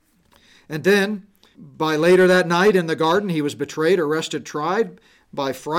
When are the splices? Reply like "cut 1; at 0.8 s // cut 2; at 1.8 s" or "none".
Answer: cut 1; at 1.5 s